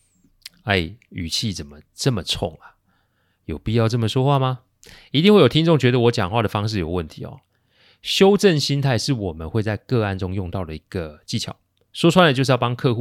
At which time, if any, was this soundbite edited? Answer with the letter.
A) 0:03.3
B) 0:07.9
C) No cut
C